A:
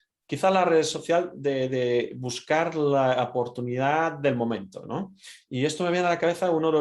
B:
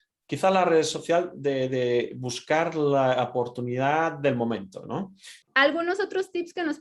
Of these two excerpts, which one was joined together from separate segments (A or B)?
B